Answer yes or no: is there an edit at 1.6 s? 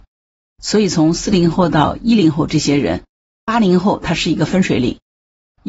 no